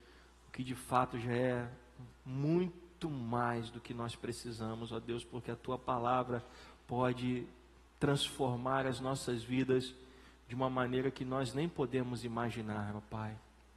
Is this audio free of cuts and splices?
yes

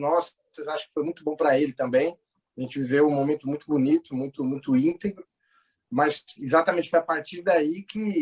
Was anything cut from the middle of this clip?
no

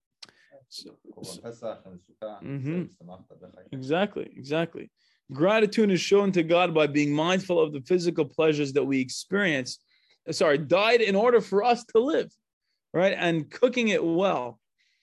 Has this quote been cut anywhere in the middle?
yes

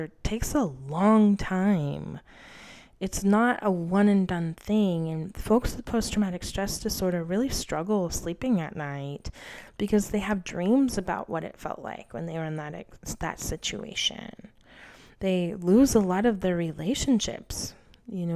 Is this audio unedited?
yes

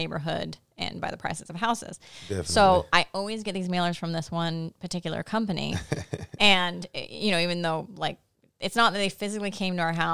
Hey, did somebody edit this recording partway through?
no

